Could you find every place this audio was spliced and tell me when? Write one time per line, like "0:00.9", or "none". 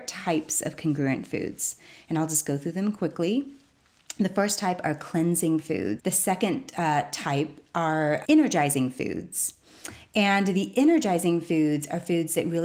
0:06.0
0:08.2